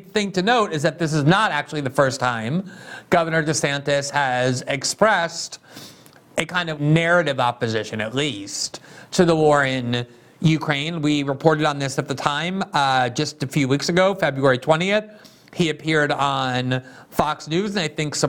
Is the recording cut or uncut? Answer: cut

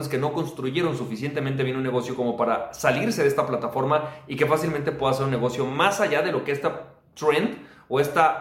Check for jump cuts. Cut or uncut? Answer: uncut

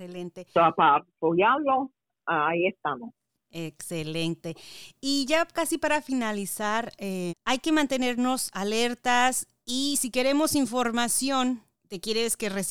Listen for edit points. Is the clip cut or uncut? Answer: cut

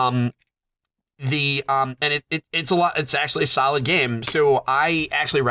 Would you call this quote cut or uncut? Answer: uncut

